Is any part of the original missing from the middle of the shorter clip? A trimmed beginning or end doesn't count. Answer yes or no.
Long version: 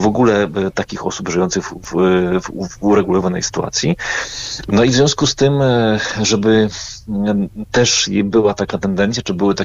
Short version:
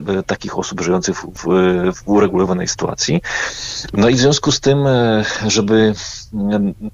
yes